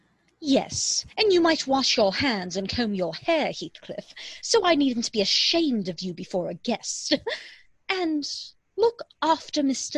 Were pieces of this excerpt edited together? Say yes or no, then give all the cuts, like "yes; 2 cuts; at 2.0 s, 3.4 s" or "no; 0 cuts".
no; 0 cuts